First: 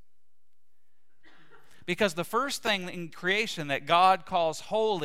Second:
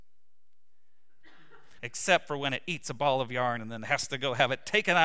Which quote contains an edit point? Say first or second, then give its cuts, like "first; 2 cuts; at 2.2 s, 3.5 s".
second; 1 cut; at 1.8 s